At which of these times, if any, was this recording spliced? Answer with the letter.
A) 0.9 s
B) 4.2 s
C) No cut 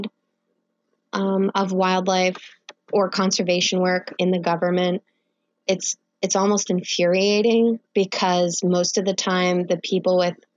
B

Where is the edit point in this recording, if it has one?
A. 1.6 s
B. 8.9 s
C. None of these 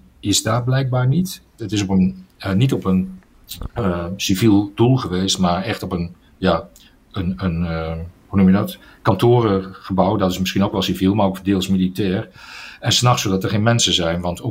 A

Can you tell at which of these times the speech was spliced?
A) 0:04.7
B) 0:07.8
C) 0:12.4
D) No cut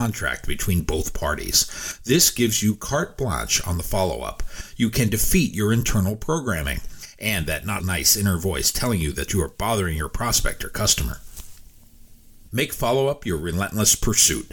B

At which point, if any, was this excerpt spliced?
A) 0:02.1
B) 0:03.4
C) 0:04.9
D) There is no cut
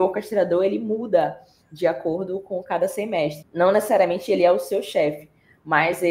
B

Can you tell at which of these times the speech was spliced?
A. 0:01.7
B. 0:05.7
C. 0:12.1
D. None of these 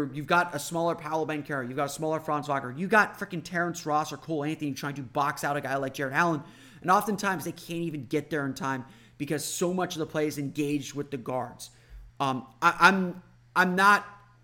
C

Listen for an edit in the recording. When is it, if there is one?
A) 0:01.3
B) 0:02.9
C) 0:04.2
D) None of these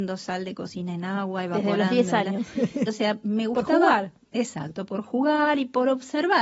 B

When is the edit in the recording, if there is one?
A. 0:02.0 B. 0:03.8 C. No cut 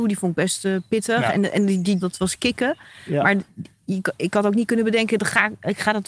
A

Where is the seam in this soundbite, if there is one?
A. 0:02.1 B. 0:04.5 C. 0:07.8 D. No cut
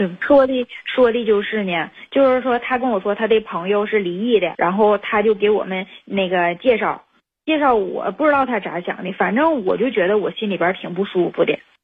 B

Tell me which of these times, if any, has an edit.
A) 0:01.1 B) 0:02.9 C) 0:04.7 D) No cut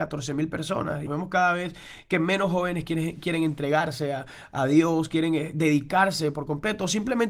A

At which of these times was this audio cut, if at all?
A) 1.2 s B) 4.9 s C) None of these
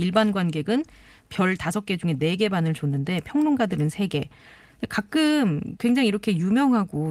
C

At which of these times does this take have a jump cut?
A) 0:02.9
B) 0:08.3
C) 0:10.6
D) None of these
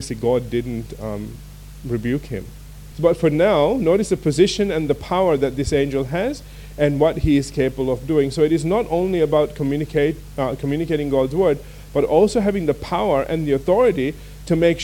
A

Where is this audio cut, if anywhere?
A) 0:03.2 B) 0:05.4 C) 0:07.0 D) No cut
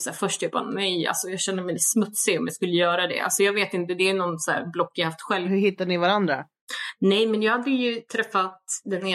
B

